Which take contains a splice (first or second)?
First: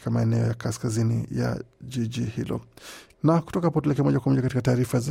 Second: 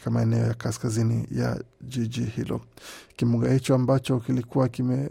first